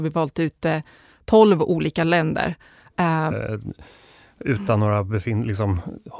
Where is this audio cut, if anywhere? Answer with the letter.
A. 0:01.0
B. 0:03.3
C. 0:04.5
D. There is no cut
B